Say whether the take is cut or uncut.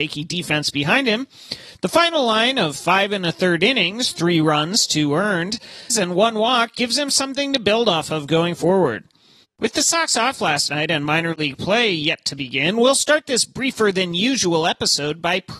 cut